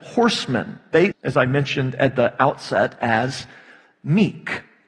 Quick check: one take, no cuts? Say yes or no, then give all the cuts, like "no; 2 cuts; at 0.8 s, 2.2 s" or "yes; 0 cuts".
no; 1 cut; at 1.1 s